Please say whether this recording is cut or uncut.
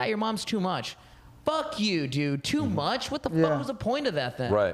uncut